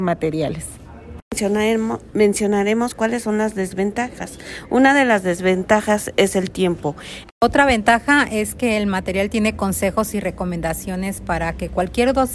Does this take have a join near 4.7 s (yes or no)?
no